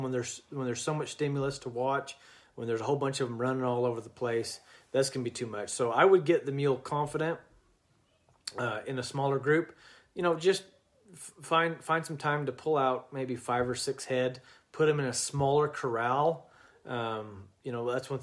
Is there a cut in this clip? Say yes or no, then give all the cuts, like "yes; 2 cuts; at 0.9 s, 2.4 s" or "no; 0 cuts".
no; 0 cuts